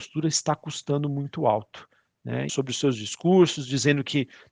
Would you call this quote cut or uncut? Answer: cut